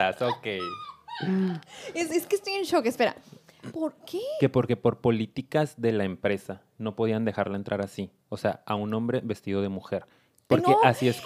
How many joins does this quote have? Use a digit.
1